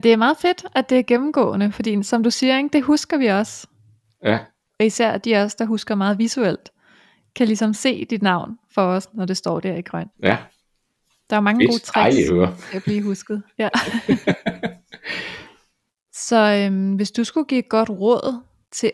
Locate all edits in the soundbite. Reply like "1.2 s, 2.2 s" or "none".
10.1 s